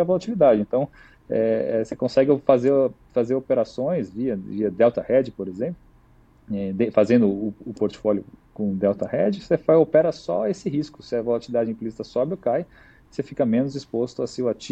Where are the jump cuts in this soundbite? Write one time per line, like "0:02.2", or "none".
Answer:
none